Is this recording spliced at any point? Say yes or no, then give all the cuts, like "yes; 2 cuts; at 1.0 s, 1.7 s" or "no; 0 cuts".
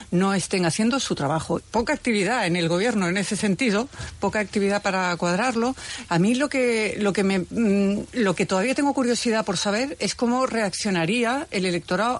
yes; 2 cuts; at 1.6 s, 6.1 s